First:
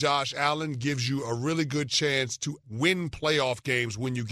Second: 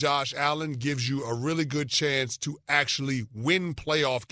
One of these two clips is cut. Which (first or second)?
first